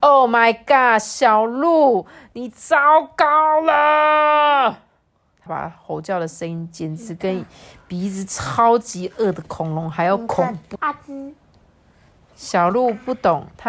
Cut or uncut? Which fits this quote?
cut